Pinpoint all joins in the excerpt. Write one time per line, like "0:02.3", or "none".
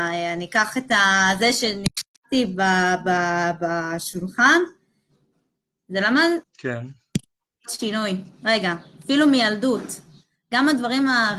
0:06.4